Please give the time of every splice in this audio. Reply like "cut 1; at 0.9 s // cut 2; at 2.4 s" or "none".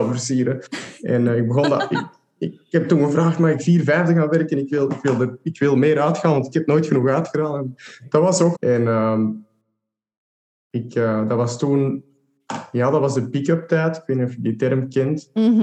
cut 1; at 8.5 s